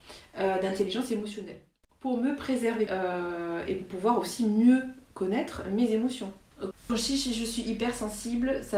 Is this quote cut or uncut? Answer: cut